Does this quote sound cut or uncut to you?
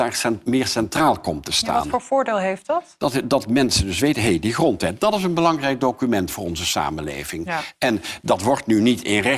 uncut